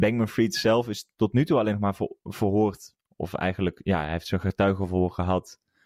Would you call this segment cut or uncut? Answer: uncut